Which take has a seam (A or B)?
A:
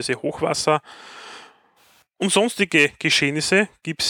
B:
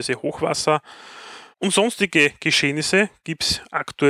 B